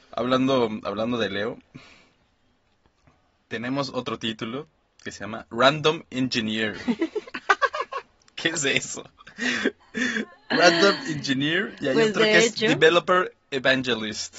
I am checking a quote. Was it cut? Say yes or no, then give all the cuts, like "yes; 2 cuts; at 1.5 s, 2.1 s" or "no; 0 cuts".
no; 0 cuts